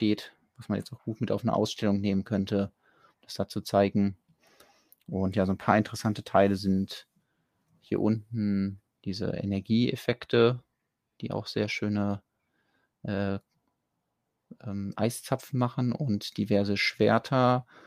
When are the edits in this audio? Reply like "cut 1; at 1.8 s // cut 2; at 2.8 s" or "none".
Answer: none